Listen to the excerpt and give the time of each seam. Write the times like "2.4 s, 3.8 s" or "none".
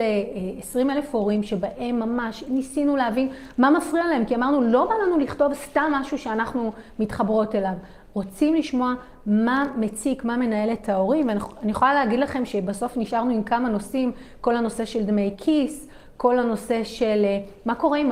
none